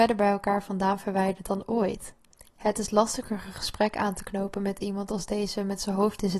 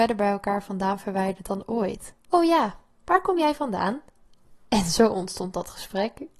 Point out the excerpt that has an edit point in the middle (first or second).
second